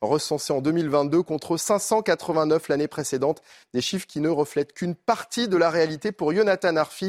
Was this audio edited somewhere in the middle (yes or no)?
no